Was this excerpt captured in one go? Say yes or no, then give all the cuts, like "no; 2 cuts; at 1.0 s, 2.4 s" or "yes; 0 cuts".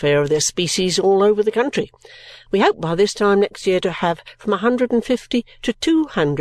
no; 1 cut; at 2.5 s